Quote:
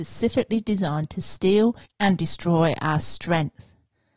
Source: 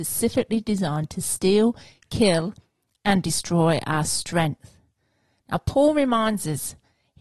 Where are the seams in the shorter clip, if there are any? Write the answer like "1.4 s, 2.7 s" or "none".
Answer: 1.9 s